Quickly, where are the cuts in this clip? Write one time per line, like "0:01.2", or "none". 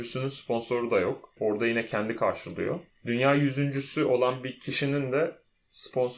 none